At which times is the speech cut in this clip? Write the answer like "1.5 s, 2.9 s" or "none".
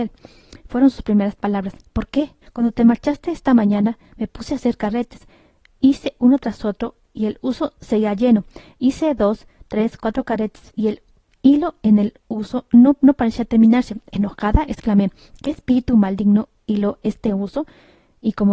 2.4 s

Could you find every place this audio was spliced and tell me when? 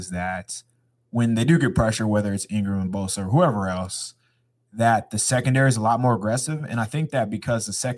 none

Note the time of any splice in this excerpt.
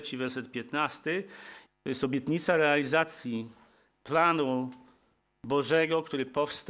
1.7 s

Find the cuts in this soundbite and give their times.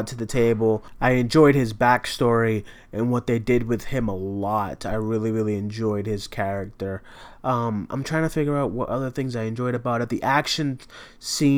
none

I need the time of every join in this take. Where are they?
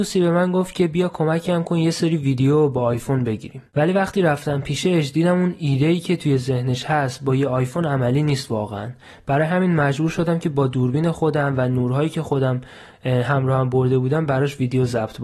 none

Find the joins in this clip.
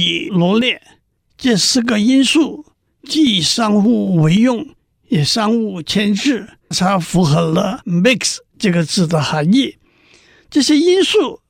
6.7 s

